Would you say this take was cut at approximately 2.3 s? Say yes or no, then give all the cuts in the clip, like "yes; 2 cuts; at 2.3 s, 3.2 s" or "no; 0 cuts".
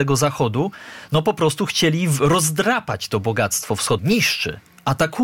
no; 1 cut; at 4.0 s